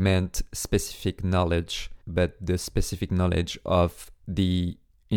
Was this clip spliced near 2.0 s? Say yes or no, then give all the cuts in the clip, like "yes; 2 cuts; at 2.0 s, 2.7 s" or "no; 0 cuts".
yes; 1 cut; at 2.0 s